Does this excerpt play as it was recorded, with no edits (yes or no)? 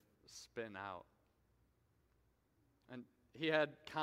yes